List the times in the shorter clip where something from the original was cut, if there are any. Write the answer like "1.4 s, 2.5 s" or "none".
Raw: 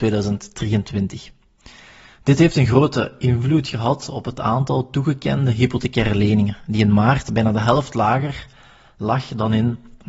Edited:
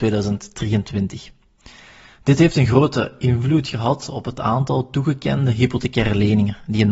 none